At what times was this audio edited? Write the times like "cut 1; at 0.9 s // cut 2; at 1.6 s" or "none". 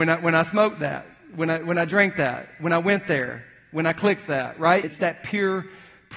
cut 1; at 4.8 s

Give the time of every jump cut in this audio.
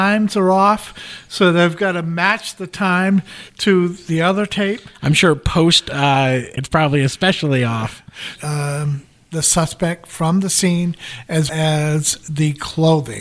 cut 1; at 6.6 s // cut 2; at 8.4 s // cut 3; at 11.5 s

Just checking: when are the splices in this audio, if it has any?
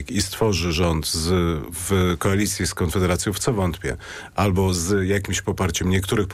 none

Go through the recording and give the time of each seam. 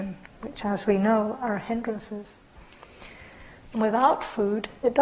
cut 1; at 3.6 s

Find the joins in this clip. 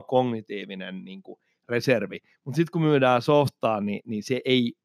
none

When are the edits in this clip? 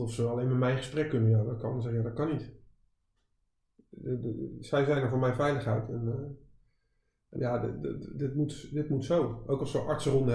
cut 1; at 7.4 s

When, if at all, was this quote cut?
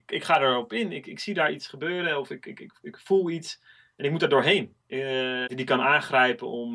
cut 1; at 5.5 s

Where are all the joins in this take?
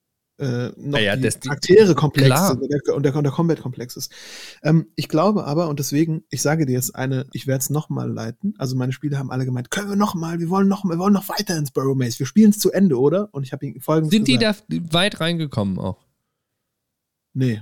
cut 1; at 7.3 s

